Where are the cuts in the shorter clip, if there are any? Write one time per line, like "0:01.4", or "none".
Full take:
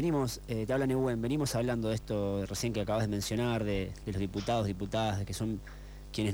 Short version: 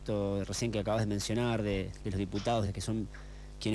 0:02.7